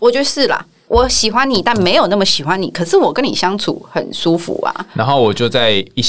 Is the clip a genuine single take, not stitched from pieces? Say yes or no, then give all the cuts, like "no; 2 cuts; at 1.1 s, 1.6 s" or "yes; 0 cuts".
yes; 0 cuts